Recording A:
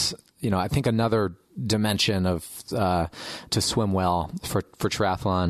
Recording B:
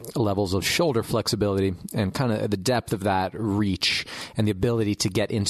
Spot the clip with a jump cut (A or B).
A